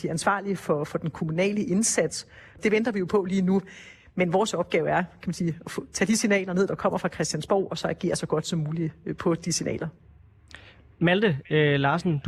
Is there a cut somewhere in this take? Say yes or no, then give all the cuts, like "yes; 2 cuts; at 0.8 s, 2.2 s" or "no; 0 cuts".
yes; 1 cut; at 2.6 s